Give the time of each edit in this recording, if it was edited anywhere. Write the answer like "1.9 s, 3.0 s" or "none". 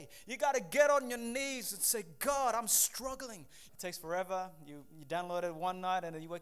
3.7 s